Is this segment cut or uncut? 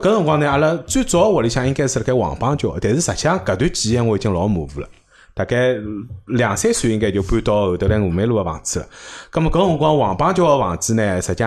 uncut